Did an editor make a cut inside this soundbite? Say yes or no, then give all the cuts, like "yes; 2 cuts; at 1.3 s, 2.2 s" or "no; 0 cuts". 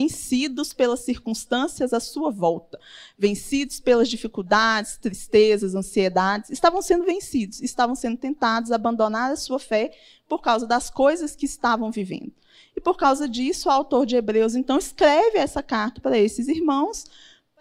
no; 0 cuts